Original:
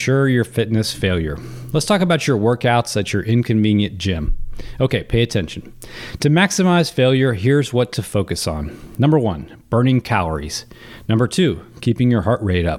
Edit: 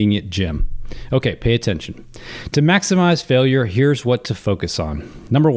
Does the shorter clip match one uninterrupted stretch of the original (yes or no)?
yes